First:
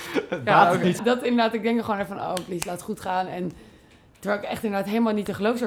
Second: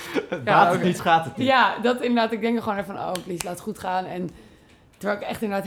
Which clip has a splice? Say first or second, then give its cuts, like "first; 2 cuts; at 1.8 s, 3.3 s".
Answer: first; 1 cut; at 1.0 s